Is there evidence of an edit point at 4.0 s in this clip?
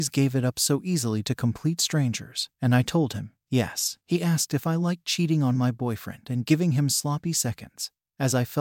no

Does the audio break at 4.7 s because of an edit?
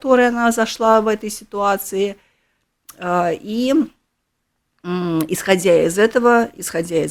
no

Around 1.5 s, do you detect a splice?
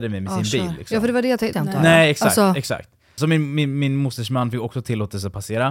yes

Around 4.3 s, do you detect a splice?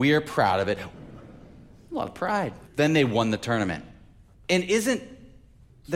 yes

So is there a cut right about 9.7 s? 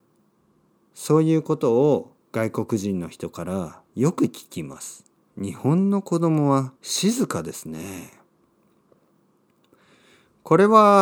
no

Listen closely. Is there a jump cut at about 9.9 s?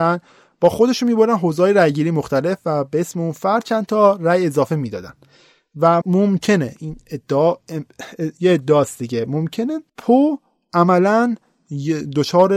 yes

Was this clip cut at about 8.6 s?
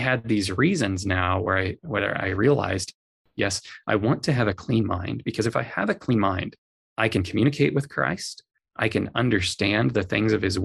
no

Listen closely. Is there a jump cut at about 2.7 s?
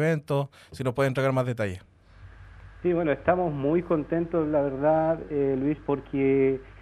no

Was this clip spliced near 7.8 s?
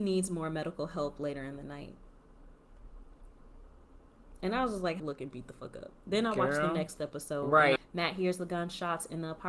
yes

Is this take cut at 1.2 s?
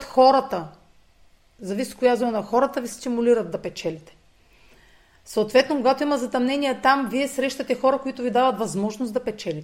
no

